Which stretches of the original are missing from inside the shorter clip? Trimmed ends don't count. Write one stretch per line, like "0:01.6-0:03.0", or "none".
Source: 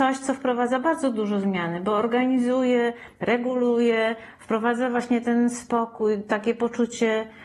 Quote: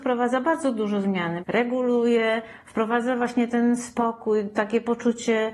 0:01.8-0:03.1